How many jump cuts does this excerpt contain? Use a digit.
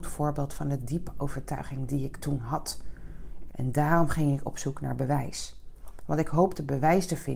1